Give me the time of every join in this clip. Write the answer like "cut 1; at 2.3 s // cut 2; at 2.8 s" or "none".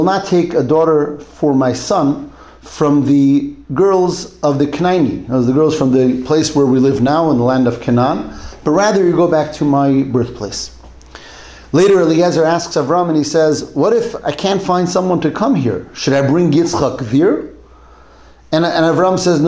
none